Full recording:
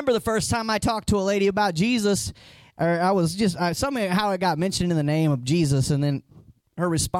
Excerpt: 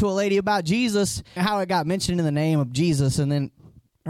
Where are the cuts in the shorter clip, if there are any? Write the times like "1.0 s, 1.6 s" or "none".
1.4 s